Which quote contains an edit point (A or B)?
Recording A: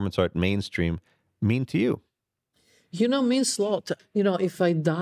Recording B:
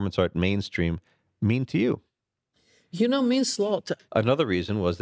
B